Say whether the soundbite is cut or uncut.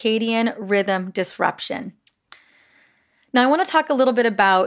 uncut